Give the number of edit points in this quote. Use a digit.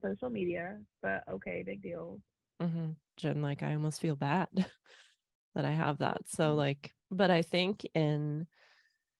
2